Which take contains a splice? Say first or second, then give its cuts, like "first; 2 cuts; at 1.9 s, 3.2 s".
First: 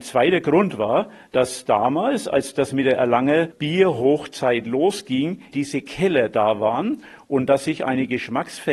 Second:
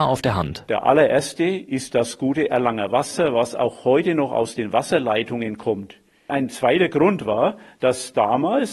first; 1 cut; at 5.5 s